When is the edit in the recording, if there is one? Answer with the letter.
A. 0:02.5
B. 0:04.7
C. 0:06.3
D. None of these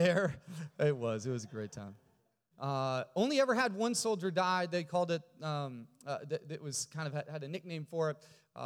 A